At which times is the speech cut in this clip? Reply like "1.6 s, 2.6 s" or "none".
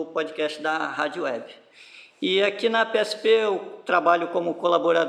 none